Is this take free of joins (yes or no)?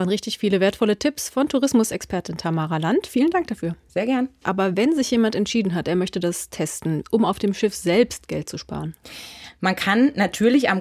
no